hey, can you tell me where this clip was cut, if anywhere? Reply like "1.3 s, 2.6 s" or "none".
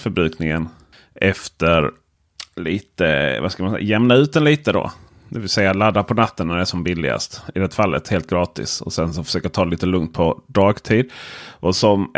none